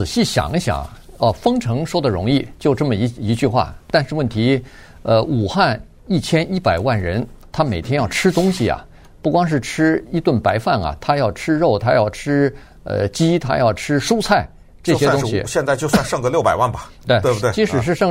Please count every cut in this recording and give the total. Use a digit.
0